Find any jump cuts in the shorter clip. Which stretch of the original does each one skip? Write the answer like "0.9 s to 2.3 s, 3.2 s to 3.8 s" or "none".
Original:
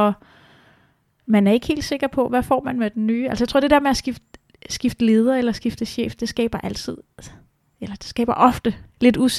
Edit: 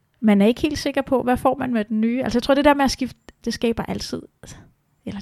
4.5 s to 6.2 s